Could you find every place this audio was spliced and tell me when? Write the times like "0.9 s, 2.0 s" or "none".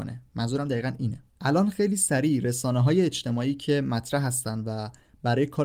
1.3 s